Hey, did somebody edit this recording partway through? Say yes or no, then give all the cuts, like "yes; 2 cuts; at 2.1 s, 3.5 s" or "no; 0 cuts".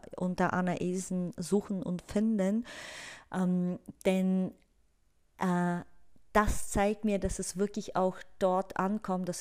no; 0 cuts